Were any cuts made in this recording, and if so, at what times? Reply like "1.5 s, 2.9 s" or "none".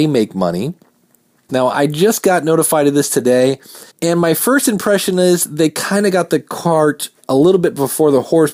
1.5 s, 3.9 s